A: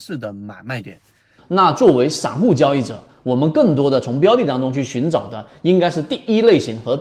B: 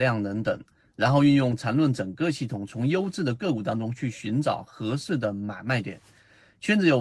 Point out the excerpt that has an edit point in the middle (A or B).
A